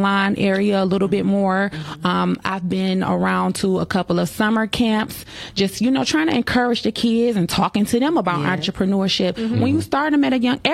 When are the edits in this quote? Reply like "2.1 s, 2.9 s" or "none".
none